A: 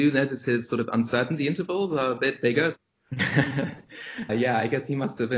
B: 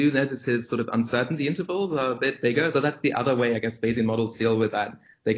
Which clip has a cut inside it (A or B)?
A